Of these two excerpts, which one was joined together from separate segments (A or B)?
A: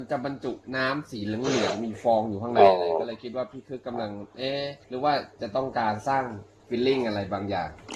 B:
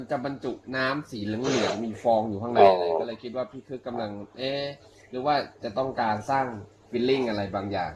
A